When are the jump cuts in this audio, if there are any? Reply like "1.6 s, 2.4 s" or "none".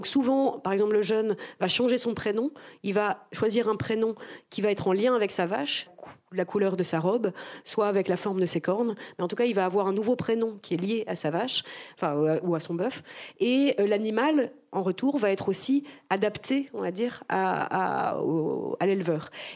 5.9 s